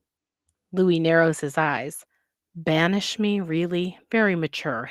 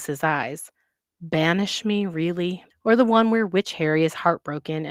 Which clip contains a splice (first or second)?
second